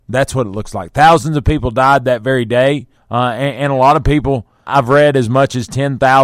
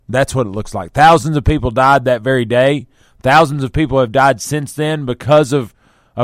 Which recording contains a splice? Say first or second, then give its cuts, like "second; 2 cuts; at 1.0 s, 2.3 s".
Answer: first; 2 cuts; at 3.0 s, 4.7 s